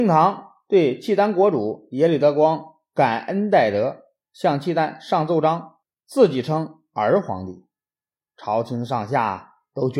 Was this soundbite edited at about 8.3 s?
no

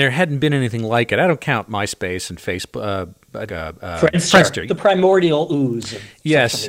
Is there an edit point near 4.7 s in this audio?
yes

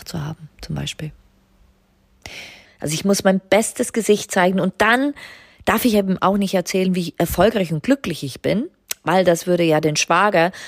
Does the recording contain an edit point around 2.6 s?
yes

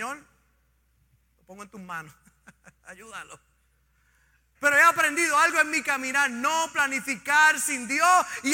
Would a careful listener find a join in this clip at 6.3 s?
no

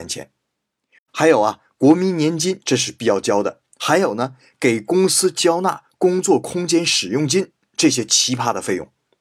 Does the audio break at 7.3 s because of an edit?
no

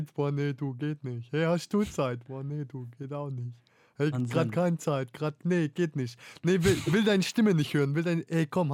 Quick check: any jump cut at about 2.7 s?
no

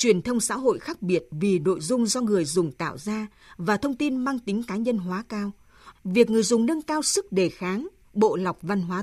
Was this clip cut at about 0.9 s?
no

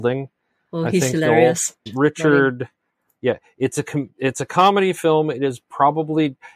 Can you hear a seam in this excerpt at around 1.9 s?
yes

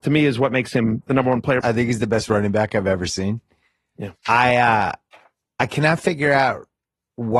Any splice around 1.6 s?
yes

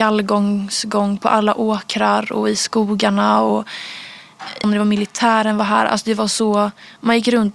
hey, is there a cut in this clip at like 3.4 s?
no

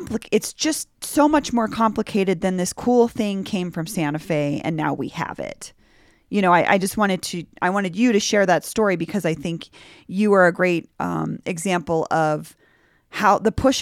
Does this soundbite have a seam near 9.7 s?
no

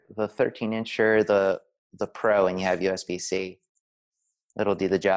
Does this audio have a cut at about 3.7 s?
no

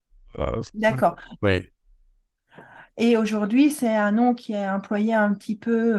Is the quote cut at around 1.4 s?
yes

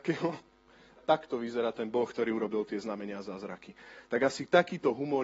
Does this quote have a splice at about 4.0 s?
no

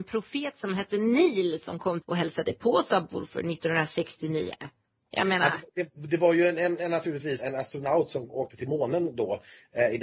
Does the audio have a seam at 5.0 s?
no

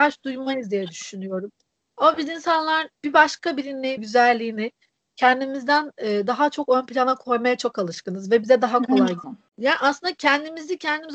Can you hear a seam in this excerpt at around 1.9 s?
no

